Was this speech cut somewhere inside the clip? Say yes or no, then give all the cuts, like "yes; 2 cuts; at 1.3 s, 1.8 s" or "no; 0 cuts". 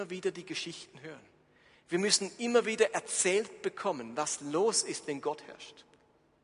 no; 0 cuts